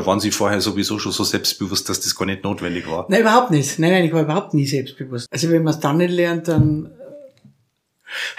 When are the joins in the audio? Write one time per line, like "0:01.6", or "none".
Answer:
0:05.3

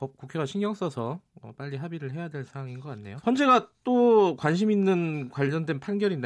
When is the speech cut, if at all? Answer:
0:03.2

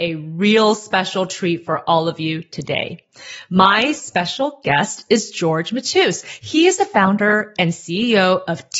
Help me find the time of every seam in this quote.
none

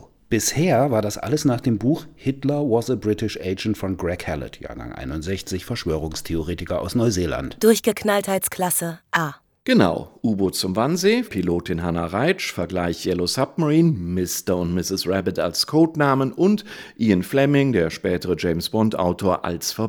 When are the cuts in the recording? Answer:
0:11.2

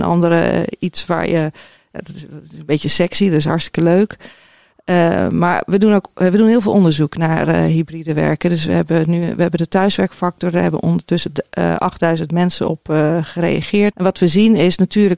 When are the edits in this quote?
0:13.9

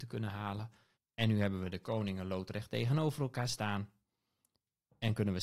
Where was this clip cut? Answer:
0:01.0

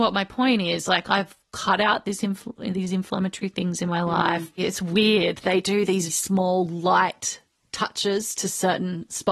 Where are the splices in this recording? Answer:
0:04.6
0:06.1

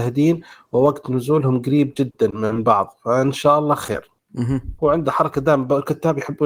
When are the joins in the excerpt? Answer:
0:04.8

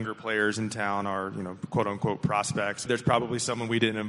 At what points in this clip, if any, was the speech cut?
0:02.9

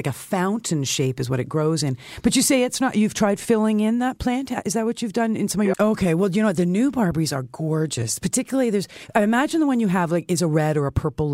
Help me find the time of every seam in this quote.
0:05.7

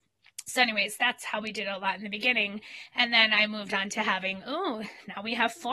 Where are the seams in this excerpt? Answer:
none

